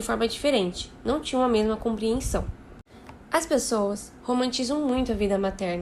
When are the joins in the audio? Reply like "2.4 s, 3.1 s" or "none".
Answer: 1.0 s

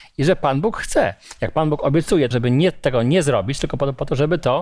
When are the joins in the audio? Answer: 2.3 s

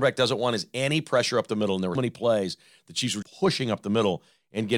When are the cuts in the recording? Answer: 2.0 s, 3.2 s

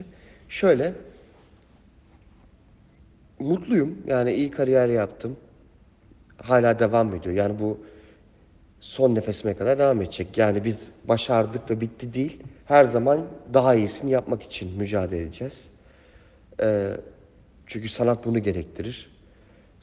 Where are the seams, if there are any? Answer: 12.6 s

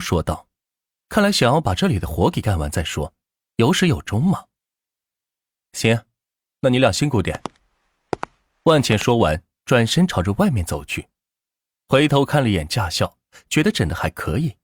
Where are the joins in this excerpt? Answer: none

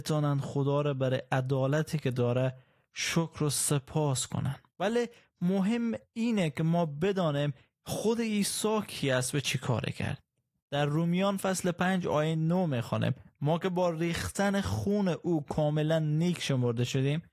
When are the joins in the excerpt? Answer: 4.7 s

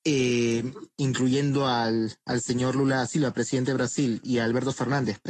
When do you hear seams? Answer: 0.9 s

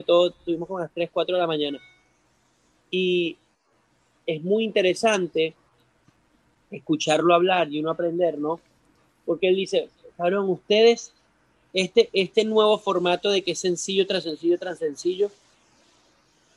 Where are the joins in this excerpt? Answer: none

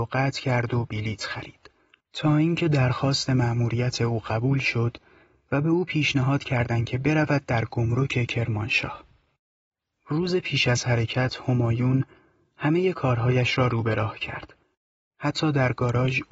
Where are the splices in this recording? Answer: 2.0 s

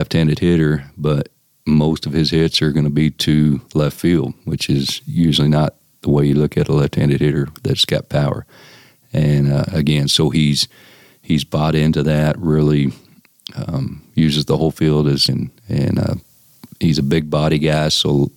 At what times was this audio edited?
15.3 s, 16.7 s

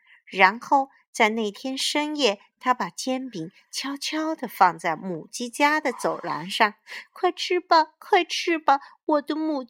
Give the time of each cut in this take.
none

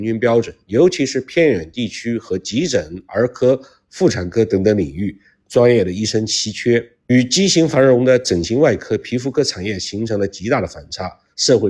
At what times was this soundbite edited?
none

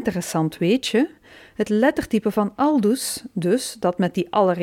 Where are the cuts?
none

